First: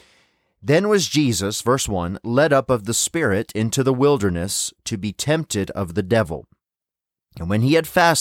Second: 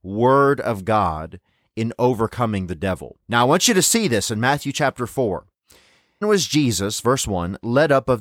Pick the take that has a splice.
second; 2 cuts; at 3.2 s, 6.2 s

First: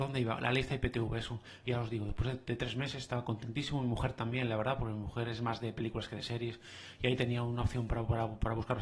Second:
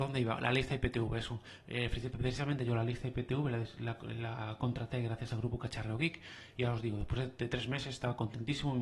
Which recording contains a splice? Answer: first; 1 cut; at 1.6 s

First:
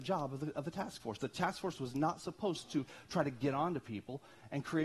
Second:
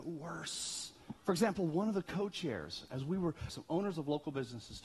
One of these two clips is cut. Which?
second; 2 cuts; at 1.2 s, 3.5 s

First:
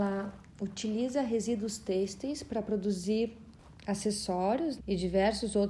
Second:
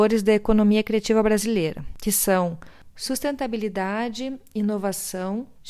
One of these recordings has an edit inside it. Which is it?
first; 1 cut; at 4.8 s

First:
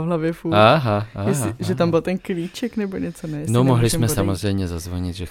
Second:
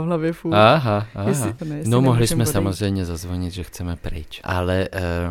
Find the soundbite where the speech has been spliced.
second; 2 cuts; at 1.6 s, 4.4 s

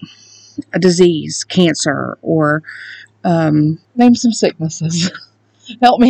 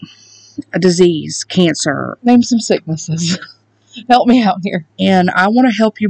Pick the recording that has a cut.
second; 2 cuts; at 2.2 s, 4.9 s

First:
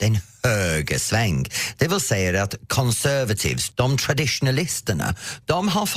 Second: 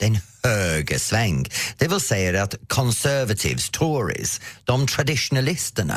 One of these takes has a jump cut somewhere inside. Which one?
first; 1 cut; at 3.7 s

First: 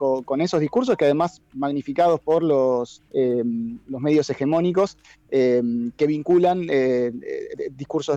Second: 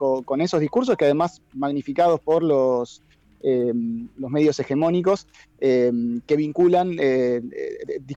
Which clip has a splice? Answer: first; 1 cut; at 3.1 s

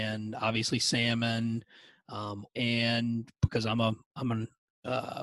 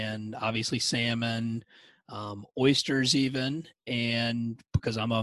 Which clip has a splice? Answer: first; 1 cut; at 2.5 s

